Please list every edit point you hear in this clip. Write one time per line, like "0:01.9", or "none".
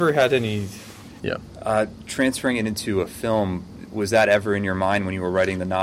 0:01.2